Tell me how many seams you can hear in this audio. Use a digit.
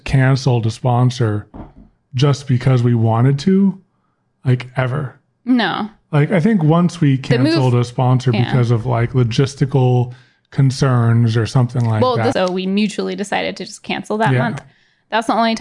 1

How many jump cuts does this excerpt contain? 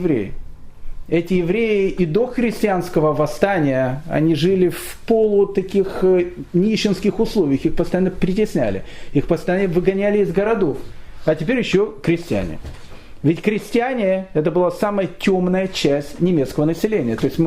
0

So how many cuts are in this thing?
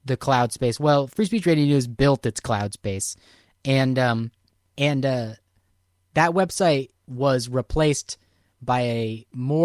2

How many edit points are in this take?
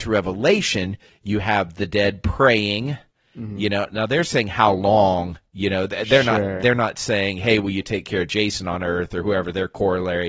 1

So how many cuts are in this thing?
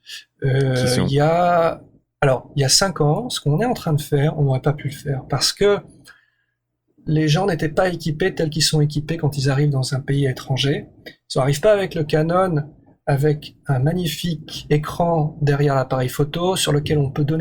0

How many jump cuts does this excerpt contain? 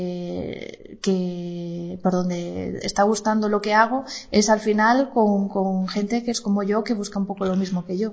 0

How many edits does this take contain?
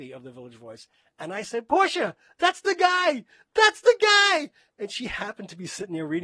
0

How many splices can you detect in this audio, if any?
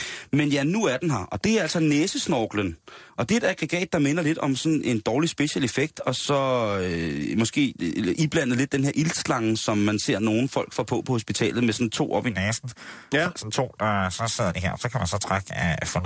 0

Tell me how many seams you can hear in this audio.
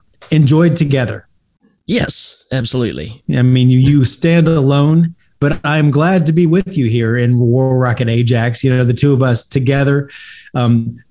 1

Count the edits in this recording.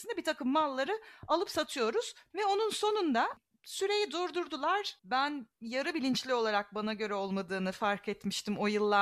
2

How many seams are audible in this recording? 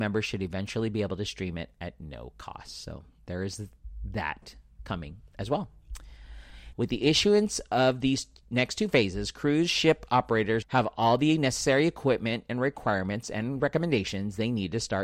2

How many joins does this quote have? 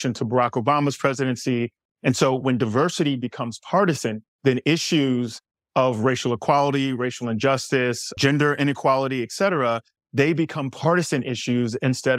3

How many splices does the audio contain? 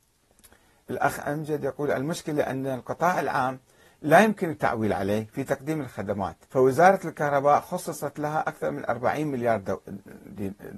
2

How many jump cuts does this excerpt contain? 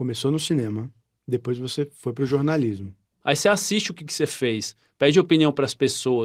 1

